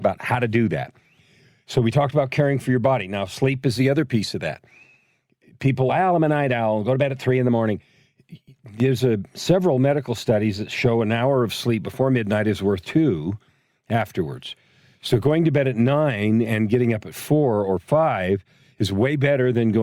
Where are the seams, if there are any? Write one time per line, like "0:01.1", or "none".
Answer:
none